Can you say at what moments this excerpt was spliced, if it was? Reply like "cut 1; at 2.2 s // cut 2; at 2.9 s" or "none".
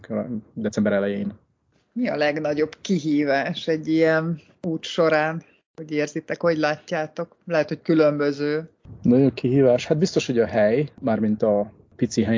none